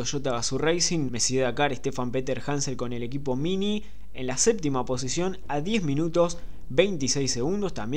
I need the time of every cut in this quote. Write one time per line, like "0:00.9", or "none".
0:01.1